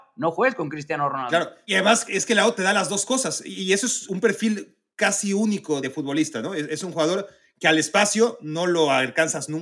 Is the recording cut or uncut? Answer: uncut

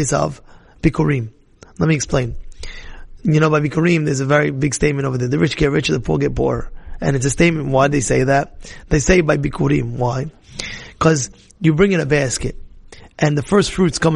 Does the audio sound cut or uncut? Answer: uncut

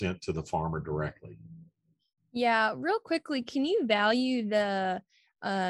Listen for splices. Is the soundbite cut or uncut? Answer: uncut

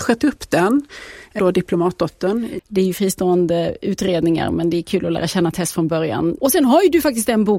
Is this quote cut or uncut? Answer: cut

